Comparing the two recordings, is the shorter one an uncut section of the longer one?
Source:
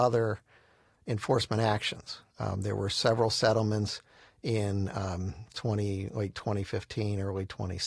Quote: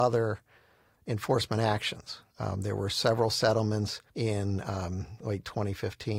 no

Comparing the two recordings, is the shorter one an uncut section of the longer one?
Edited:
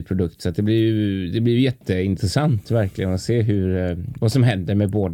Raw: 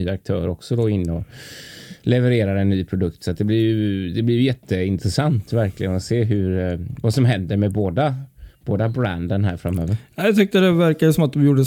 yes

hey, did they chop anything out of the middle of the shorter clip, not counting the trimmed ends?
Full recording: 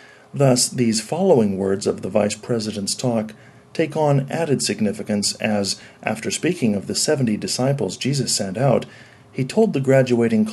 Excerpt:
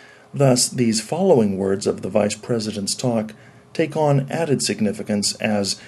no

